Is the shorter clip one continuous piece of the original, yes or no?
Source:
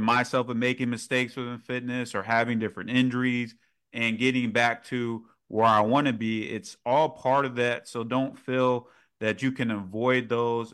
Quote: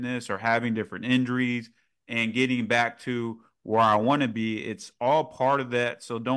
yes